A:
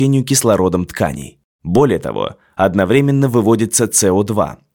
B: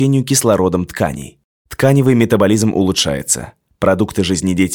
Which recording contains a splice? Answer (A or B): B